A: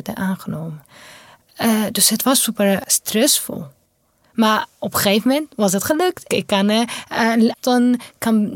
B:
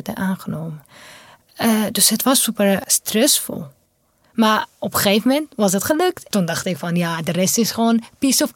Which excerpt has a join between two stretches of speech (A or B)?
A